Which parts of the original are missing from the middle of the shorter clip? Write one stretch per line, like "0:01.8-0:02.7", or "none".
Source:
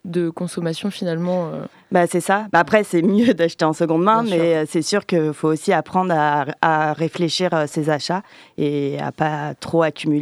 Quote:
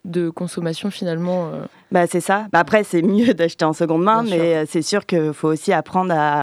none